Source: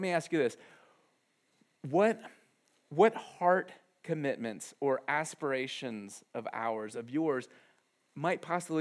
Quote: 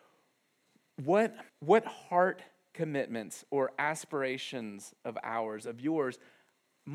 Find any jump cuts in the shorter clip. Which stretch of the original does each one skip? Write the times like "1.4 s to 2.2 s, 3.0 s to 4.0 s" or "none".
2.3 s to 2.8 s